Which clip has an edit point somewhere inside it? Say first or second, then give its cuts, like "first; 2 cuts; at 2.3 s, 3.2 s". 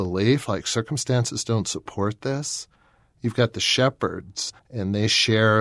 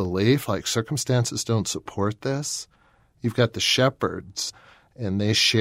first; 1 cut; at 4.6 s